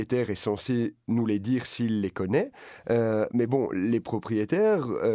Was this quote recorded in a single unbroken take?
yes; 0 cuts

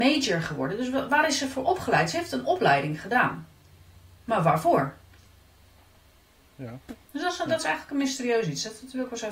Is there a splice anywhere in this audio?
yes; 1 cut; at 7.0 s

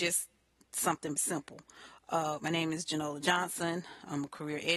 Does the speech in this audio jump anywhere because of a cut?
yes; 2 cuts; at 1.2 s, 2.4 s

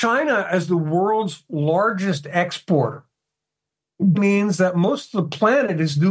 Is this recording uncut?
no; 1 cut; at 4.1 s

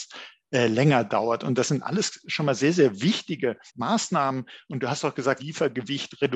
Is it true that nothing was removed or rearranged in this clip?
no; 2 cuts; at 3.7 s, 5.4 s

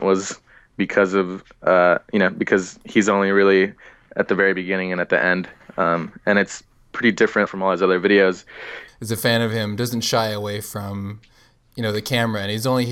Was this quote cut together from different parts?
yes; 2 cuts; at 7.5 s, 8.9 s

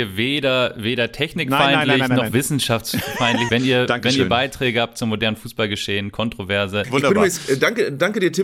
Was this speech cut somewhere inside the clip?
yes; 2 cuts; at 3.5 s, 6.8 s

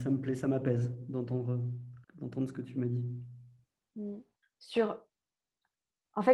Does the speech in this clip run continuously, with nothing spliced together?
no; 2 cuts; at 2.0 s, 4.4 s

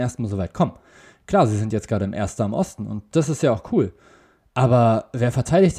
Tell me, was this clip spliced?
no; 0 cuts

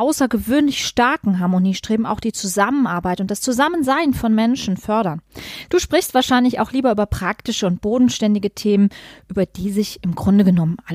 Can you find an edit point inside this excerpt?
yes; 1 cut; at 5.7 s

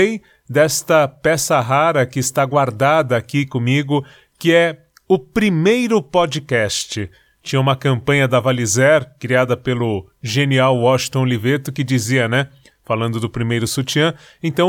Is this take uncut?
no; 1 cut; at 12.7 s

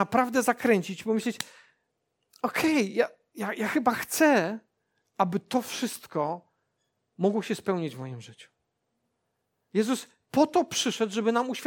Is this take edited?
no; 0 cuts

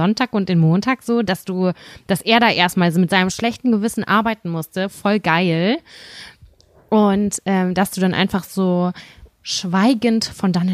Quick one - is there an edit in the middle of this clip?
no; 0 cuts

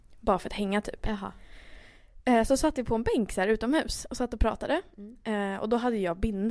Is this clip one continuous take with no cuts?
yes; 0 cuts

